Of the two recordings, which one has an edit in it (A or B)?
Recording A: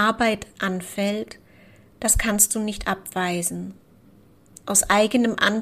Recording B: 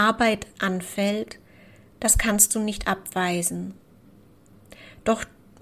A